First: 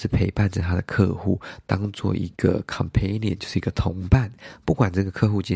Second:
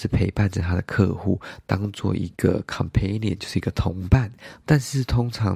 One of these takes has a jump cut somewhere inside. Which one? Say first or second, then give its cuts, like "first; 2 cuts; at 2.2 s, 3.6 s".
second; 1 cut; at 4.6 s